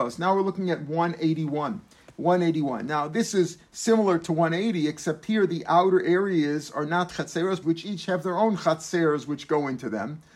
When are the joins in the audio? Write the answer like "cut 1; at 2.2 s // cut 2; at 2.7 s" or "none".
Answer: cut 1; at 7.6 s